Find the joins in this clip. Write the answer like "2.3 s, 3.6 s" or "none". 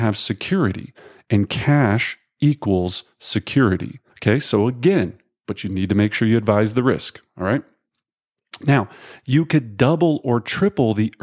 4.1 s